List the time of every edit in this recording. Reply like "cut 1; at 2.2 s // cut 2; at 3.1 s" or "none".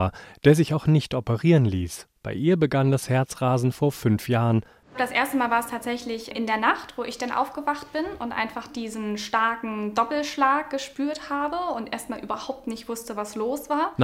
cut 1; at 4.8 s